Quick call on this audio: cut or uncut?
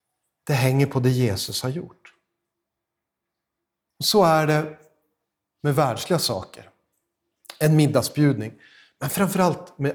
cut